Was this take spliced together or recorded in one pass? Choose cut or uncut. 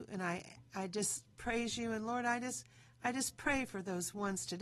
uncut